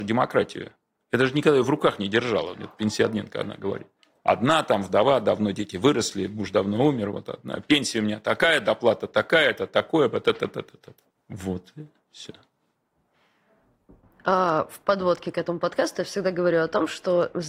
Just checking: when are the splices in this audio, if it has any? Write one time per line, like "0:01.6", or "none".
0:04.2